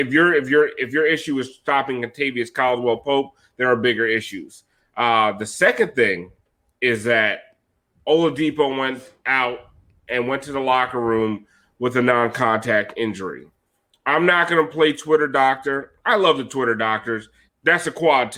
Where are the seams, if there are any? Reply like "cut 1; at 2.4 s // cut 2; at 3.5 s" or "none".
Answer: cut 1; at 17.5 s